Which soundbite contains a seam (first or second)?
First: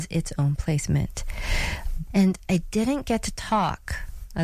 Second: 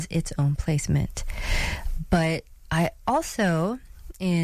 first